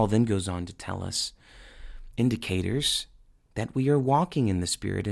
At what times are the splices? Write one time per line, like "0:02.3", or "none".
none